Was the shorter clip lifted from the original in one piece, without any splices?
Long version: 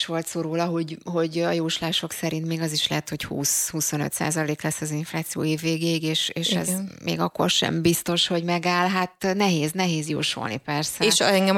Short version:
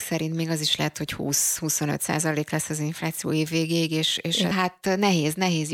no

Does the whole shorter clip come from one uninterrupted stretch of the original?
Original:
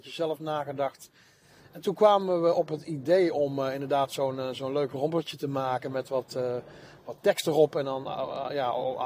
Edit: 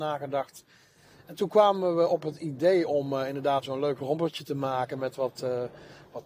no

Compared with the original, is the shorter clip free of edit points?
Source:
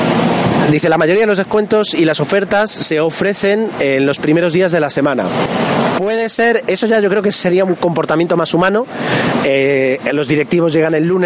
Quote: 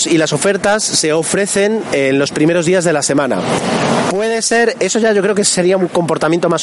yes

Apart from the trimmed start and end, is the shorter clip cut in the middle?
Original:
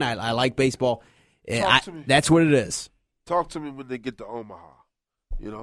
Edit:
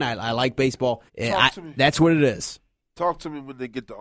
yes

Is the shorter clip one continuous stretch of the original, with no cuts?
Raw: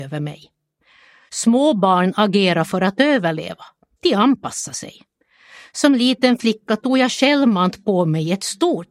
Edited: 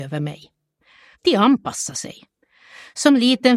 no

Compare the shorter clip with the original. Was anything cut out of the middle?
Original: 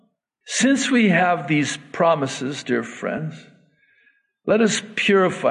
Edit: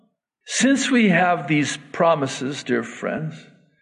no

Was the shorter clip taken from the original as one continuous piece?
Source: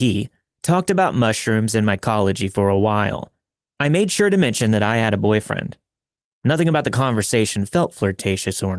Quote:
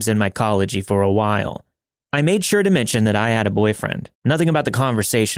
no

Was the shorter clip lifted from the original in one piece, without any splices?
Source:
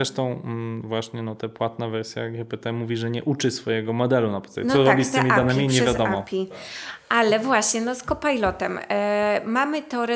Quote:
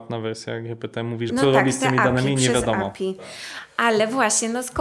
no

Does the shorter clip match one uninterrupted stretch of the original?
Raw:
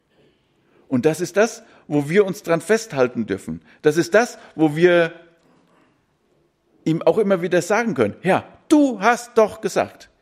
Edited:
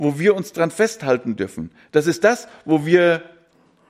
yes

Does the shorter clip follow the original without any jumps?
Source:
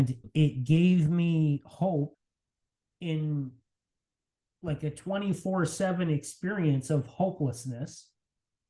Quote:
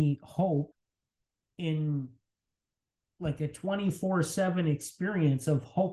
yes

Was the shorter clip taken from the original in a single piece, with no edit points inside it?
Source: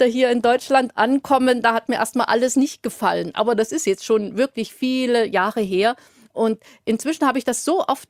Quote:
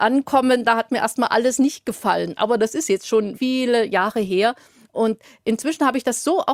no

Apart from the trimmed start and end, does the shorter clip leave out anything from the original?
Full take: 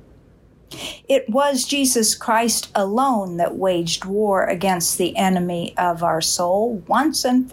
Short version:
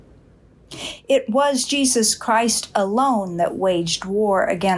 no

